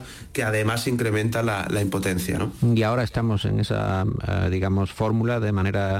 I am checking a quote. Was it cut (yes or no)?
no